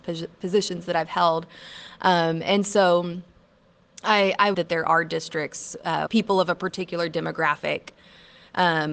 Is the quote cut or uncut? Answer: cut